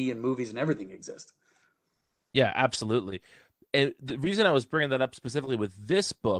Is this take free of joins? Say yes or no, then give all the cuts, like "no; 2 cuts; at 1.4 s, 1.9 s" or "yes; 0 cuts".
yes; 0 cuts